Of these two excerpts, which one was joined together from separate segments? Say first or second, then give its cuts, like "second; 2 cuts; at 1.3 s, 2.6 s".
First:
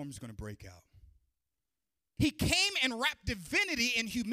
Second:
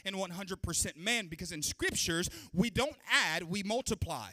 first; 1 cut; at 2.2 s